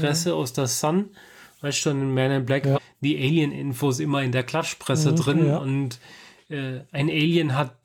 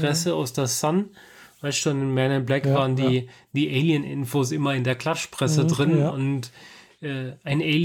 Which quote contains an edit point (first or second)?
first